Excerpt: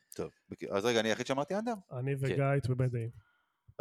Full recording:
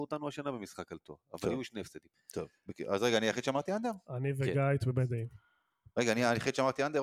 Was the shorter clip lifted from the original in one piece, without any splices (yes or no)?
yes